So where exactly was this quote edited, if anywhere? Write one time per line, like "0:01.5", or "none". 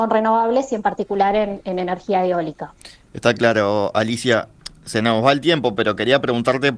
none